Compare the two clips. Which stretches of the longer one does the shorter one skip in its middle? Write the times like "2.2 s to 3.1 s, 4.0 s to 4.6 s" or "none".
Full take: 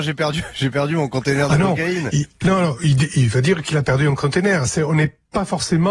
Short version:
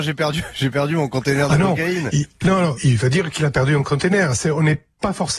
2.8 s to 3.1 s